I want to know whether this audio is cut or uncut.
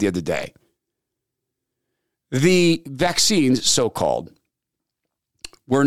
uncut